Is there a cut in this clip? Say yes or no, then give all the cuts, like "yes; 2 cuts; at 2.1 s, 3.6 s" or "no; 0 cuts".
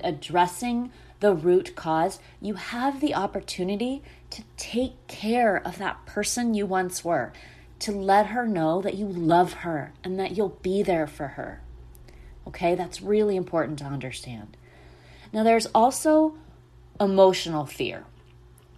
no; 0 cuts